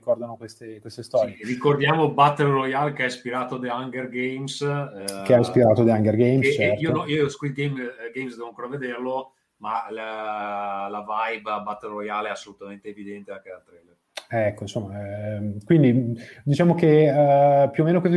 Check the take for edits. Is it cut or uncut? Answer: uncut